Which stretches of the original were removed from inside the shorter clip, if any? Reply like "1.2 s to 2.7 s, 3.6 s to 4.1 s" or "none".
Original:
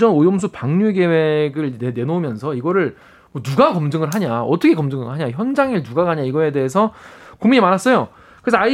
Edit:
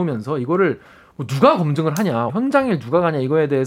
4.4 s to 5.3 s